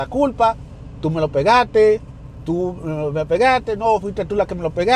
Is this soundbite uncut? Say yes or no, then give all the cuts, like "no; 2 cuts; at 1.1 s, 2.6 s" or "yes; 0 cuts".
yes; 0 cuts